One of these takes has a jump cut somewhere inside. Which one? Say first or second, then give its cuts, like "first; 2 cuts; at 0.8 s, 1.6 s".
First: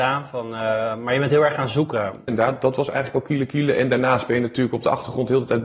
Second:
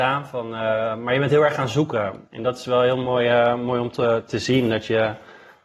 first; 1 cut; at 2.3 s